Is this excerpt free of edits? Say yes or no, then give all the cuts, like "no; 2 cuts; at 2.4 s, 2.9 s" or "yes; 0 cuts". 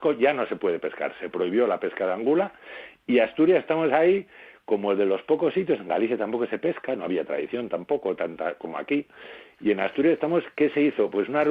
yes; 0 cuts